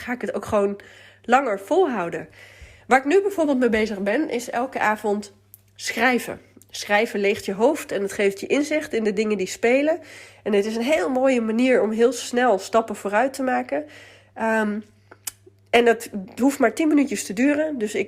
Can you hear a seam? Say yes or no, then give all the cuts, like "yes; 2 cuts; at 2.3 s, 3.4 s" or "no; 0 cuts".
no; 0 cuts